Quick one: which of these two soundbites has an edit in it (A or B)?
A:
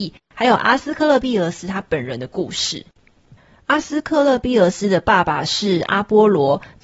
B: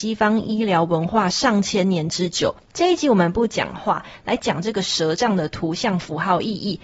B